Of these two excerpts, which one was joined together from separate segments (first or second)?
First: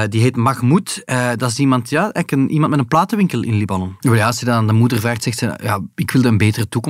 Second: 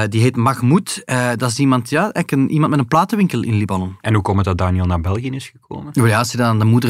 first